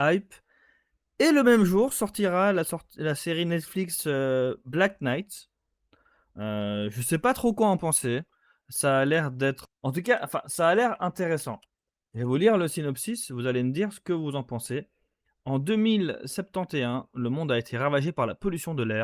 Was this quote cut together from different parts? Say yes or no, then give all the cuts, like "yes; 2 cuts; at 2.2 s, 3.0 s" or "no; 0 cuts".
yes; 1 cut; at 9.6 s